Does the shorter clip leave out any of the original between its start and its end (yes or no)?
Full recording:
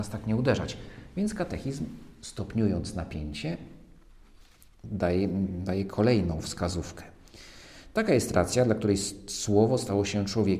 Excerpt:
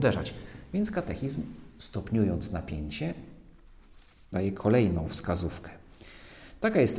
yes